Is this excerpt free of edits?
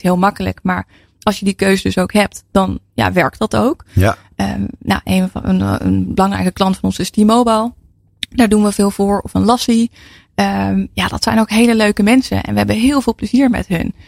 yes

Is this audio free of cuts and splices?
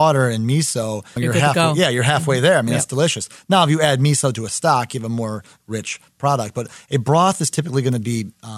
no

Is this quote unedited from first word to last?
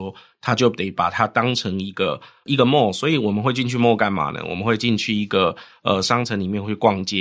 yes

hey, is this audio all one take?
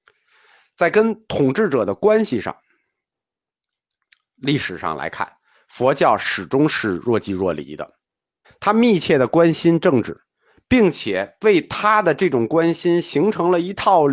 no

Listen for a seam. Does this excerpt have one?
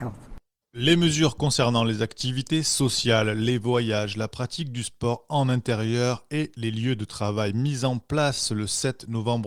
no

